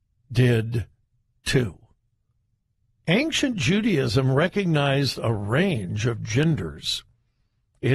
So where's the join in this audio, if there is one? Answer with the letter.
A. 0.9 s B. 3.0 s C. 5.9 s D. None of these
B